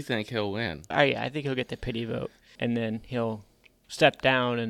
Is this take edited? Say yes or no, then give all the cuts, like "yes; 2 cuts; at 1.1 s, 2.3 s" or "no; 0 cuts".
yes; 2 cuts; at 0.9 s, 2.6 s